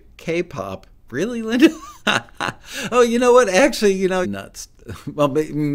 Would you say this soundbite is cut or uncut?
cut